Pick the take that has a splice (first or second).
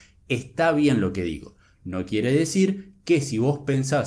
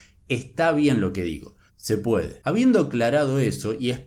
second